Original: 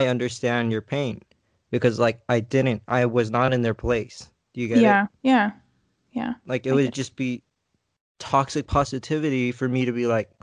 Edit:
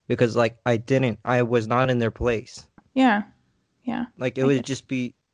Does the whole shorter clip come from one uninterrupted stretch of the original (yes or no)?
no